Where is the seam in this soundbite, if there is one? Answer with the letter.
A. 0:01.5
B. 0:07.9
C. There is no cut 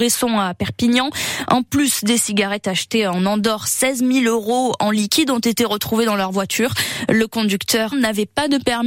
B